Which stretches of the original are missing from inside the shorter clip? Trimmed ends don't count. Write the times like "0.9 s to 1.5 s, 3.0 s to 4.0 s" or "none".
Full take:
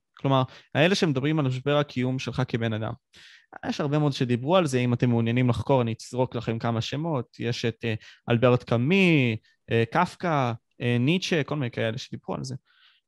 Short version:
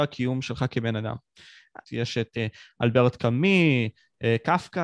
3.6 s to 7.3 s